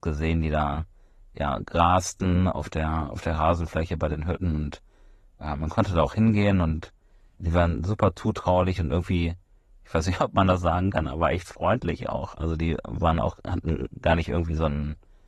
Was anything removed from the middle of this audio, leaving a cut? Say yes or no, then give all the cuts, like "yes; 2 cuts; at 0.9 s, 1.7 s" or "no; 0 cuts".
no; 0 cuts